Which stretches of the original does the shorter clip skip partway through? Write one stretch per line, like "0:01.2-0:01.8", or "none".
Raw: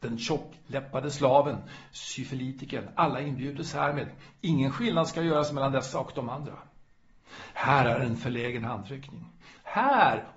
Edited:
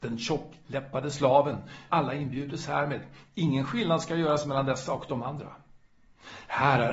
0:01.9-0:03.0